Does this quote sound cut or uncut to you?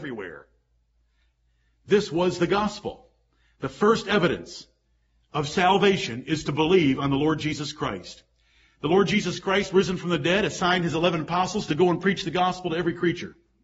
uncut